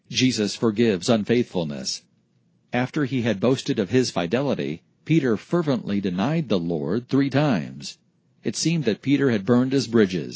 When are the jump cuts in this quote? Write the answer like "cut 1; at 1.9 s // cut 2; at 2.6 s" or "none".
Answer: none